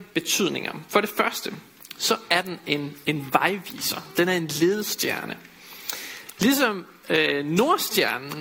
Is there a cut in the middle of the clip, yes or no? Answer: no